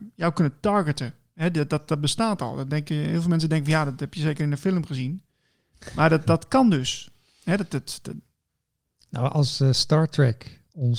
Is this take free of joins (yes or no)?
yes